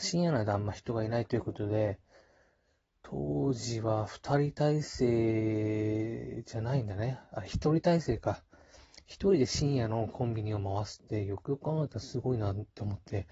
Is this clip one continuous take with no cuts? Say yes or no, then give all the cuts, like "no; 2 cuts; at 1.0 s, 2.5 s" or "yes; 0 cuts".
yes; 0 cuts